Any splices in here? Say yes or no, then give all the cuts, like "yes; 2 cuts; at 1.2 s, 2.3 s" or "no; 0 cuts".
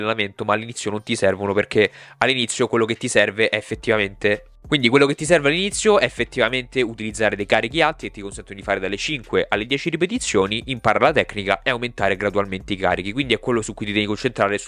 no; 0 cuts